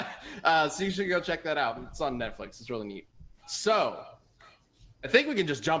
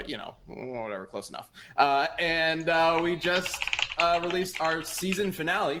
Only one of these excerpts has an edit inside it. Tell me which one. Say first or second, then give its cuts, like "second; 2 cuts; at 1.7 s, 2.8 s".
first; 1 cut; at 3.4 s